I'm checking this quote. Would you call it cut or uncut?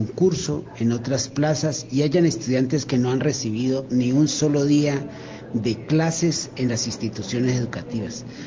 uncut